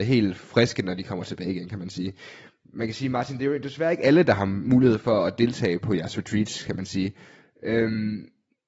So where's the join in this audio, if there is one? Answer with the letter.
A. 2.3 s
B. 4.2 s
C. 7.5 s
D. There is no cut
D